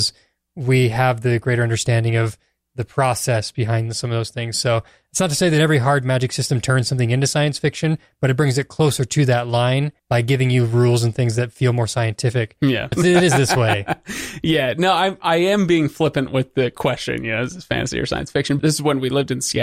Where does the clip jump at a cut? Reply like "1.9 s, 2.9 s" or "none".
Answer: 10.0 s, 12.9 s, 18.6 s